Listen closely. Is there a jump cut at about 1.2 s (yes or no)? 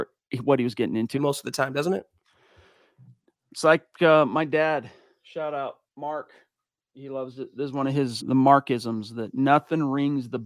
yes